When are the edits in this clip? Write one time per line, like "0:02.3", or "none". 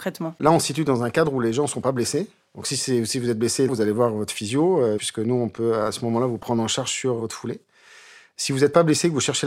0:03.7
0:05.0